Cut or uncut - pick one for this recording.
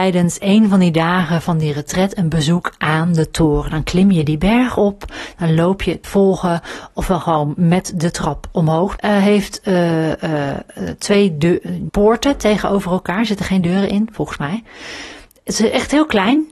cut